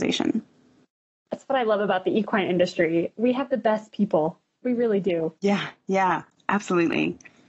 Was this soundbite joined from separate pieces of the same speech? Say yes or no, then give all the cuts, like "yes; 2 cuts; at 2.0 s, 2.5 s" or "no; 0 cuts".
yes; 1 cut; at 5.4 s